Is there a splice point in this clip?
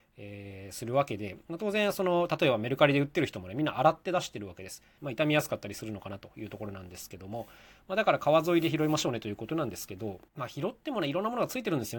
yes; 2 cuts; at 5.0 s, 10.3 s

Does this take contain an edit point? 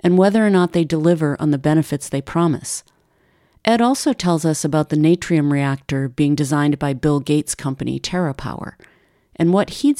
no; 0 cuts

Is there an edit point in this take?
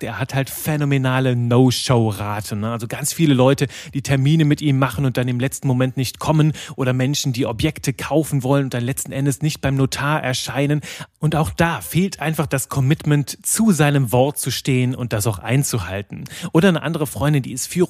no; 0 cuts

